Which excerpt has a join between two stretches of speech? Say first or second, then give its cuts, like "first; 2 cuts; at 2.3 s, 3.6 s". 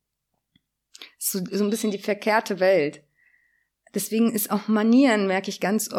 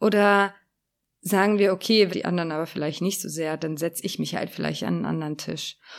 second; 1 cut; at 2.1 s